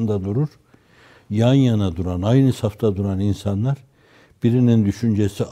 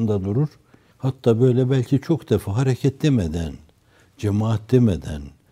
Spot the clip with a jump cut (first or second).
second